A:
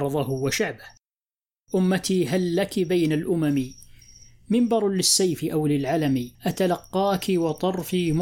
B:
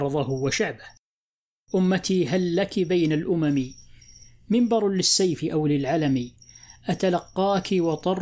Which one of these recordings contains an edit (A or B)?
A